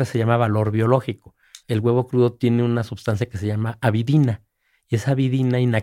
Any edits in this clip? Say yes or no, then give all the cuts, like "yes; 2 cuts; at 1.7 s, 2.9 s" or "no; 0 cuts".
yes; 1 cut; at 1.6 s